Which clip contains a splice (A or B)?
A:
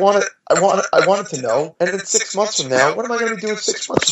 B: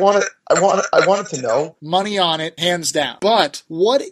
B